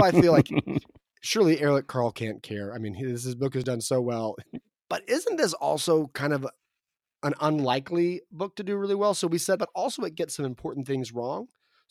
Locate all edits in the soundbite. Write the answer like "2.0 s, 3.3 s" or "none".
4.4 s, 9.6 s